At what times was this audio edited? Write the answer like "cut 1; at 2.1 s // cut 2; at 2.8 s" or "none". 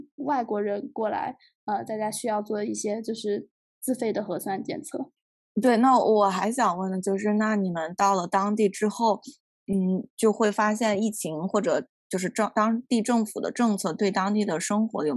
cut 1; at 5.5 s